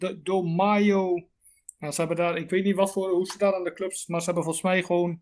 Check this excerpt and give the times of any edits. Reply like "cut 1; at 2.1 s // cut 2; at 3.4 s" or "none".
none